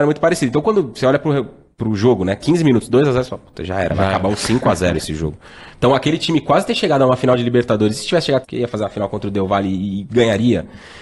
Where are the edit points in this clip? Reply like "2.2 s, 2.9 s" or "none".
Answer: 5.7 s, 8.4 s